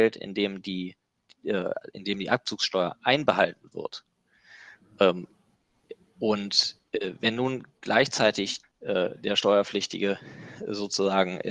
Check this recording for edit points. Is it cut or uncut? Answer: cut